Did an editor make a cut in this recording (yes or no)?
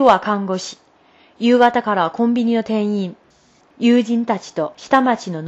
yes